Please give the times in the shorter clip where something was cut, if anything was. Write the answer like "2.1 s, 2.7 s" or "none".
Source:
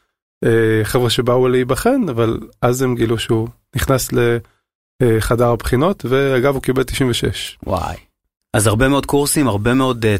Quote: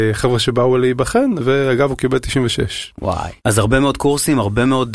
1.4 s, 3.4 s